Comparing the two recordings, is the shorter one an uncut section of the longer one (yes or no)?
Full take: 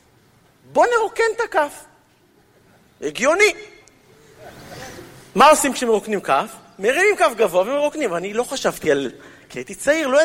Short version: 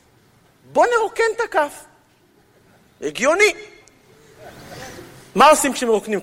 yes